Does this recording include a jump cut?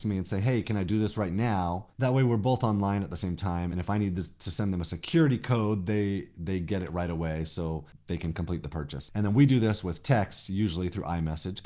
no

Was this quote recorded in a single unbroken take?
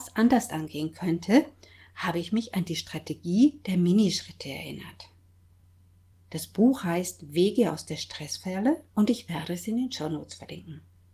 no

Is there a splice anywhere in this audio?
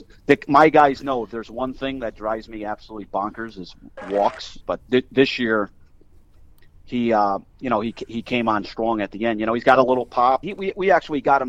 yes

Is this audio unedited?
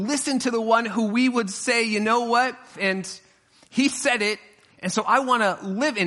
no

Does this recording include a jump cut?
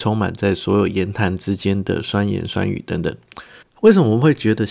yes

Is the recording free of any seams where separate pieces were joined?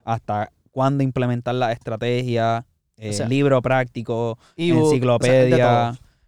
yes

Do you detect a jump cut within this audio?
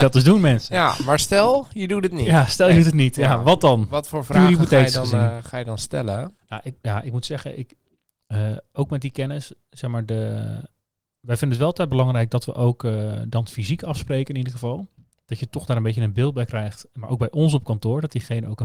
no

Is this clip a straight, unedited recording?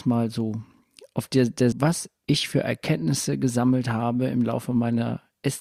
no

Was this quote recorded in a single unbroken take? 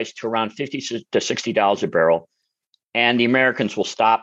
yes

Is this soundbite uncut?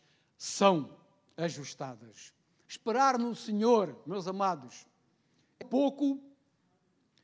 no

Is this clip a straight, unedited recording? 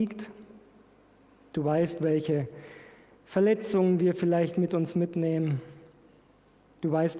yes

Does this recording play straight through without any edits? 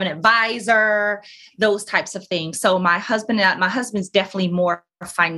yes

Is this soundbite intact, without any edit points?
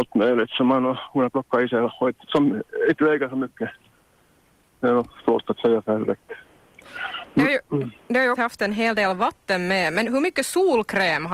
no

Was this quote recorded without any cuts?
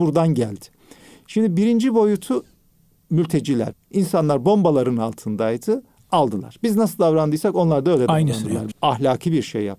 no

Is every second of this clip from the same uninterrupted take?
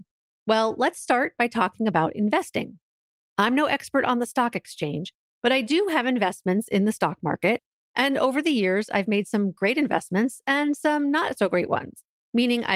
yes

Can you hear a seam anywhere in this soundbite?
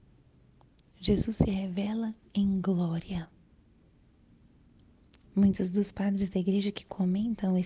yes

